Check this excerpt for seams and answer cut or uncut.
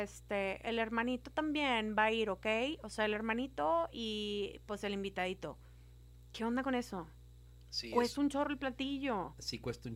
uncut